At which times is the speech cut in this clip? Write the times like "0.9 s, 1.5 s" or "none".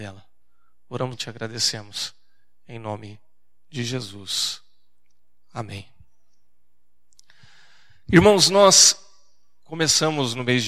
1.1 s